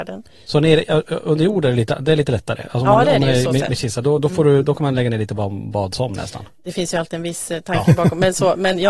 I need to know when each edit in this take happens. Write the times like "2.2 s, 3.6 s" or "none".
none